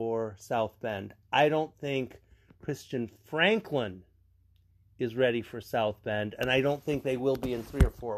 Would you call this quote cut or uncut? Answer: uncut